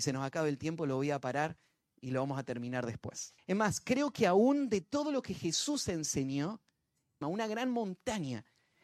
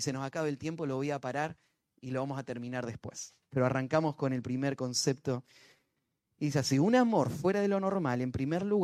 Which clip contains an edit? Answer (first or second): first